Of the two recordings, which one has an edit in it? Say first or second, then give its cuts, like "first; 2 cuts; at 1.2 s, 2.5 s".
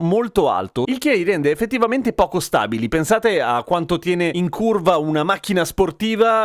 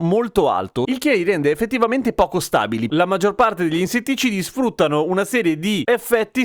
second; 1 cut; at 2.9 s